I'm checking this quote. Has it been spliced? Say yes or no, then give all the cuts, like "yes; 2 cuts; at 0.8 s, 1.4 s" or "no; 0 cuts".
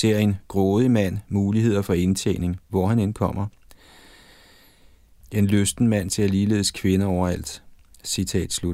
no; 0 cuts